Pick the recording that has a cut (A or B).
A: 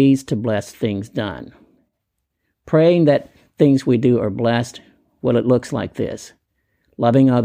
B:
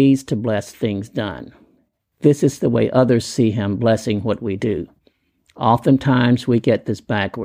B